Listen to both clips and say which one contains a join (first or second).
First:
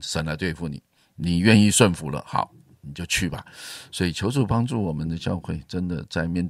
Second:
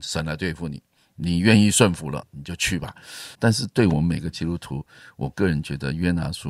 second